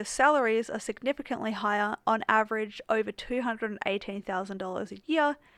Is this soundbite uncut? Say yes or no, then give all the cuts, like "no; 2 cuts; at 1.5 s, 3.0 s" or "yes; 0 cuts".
yes; 0 cuts